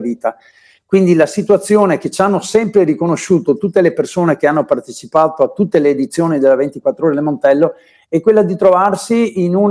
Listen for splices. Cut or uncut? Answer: uncut